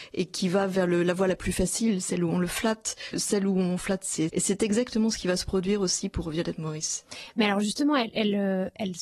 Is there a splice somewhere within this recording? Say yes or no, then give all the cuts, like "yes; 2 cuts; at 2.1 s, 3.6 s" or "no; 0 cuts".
yes; 2 cuts; at 3.1 s, 4.3 s